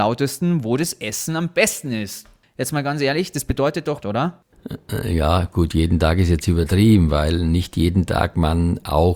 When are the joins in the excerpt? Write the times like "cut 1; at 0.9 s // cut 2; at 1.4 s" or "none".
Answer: cut 1; at 2.4 s // cut 2; at 4.0 s